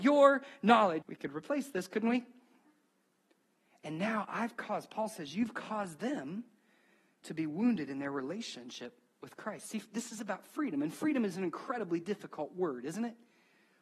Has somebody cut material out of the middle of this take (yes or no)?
yes